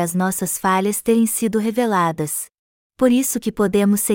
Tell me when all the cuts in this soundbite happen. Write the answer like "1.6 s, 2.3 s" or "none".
2.8 s